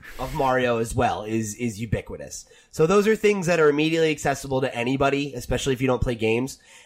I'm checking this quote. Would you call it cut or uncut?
uncut